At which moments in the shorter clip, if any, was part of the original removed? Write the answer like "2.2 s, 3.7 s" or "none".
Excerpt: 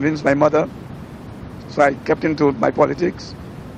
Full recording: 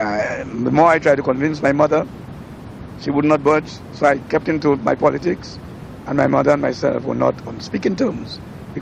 1.6 s